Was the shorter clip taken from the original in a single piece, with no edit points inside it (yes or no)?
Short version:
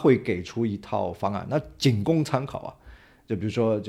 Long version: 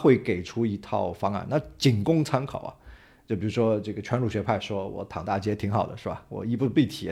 yes